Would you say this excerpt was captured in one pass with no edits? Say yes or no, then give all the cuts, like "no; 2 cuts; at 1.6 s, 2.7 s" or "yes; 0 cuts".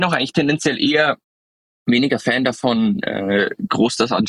yes; 0 cuts